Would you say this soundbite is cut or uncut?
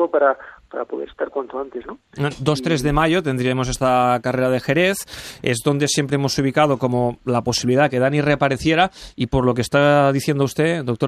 uncut